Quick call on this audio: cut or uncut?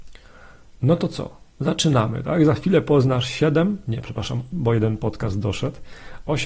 cut